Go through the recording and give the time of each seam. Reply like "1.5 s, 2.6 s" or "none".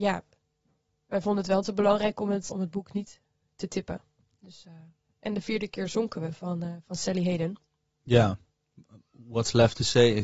2.5 s